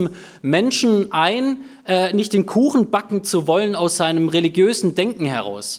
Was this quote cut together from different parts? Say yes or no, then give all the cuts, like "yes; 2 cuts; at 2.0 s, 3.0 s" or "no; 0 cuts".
no; 0 cuts